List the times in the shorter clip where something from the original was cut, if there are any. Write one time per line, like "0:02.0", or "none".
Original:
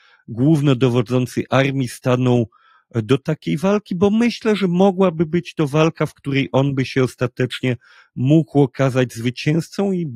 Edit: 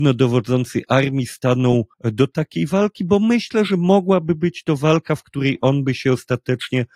0:01.9